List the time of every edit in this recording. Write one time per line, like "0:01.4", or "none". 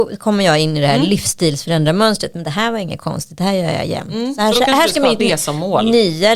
0:05.2

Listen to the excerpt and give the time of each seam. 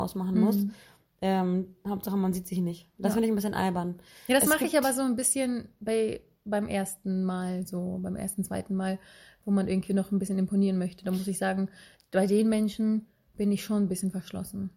none

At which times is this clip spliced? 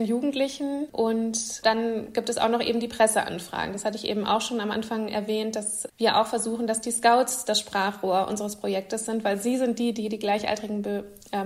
none

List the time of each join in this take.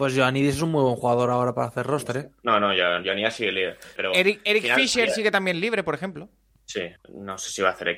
0:04.0
0:07.0

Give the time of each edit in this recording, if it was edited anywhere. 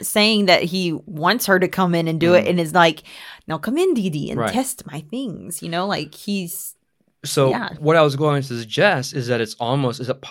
none

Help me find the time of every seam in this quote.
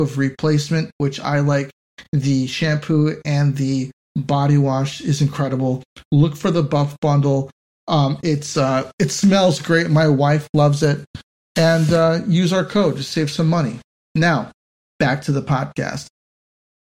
none

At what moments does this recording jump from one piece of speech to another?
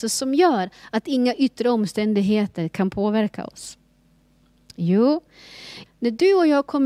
0:05.8

